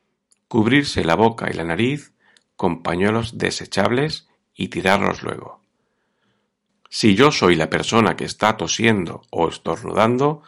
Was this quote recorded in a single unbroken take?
no; 1 cut; at 6.7 s

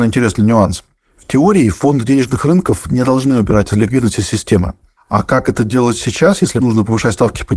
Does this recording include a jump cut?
yes; 1 cut; at 5.0 s

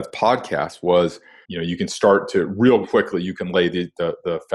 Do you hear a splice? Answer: yes; 2 cuts; at 1.4 s, 2.8 s

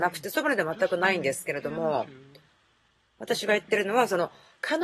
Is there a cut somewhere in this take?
no; 0 cuts

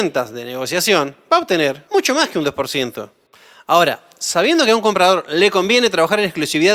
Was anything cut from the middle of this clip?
yes; 1 cut; at 1.9 s

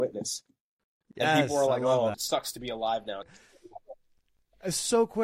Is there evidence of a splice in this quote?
yes; 2 cuts; at 2.1 s, 3.2 s

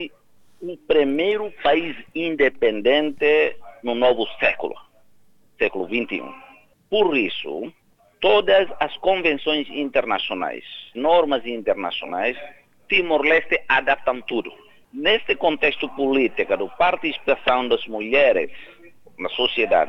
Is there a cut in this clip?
yes; 1 cut; at 10.9 s

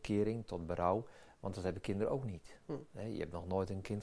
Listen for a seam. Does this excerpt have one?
no; 0 cuts

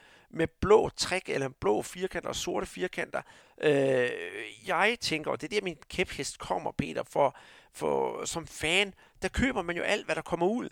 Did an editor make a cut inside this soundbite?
yes; 1 cut; at 3.4 s

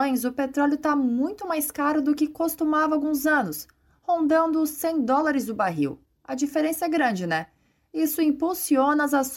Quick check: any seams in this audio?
yes; 1 cut; at 6.1 s

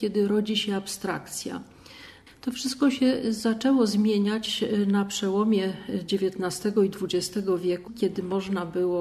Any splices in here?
yes; 2 cuts; at 2.3 s, 7.9 s

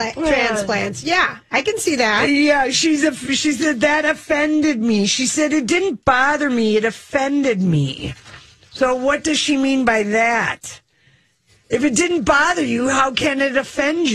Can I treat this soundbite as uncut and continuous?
yes; 0 cuts

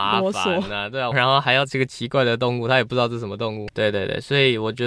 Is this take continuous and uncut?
no; 2 cuts; at 1.1 s, 3.7 s

